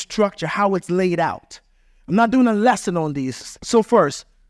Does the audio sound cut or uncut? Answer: cut